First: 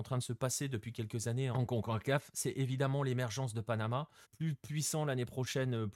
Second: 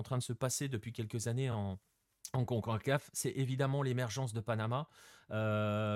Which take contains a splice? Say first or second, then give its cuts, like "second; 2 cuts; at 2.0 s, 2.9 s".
first; 2 cuts; at 1.5 s, 4.2 s